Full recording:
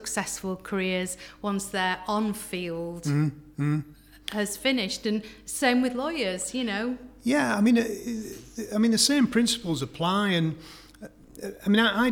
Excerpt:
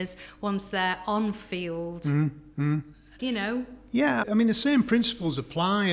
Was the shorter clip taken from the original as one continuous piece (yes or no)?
no